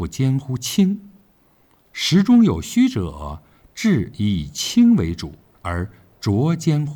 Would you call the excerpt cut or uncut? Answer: uncut